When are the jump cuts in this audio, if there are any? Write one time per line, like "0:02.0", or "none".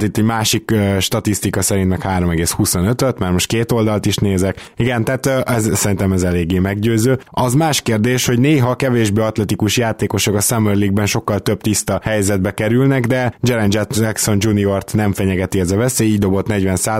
0:07.3